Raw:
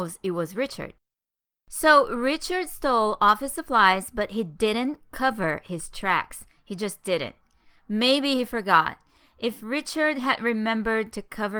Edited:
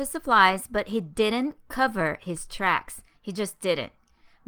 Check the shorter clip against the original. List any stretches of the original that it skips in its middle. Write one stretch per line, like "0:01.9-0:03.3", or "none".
none